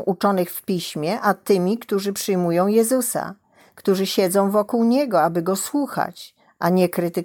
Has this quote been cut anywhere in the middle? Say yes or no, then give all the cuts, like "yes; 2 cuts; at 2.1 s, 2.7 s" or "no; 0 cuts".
no; 0 cuts